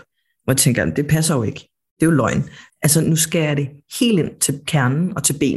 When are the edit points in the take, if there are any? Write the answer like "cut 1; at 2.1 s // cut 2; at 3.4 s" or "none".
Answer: cut 1; at 2.7 s